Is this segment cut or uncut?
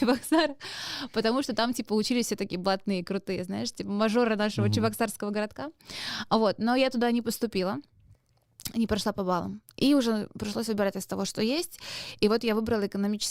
uncut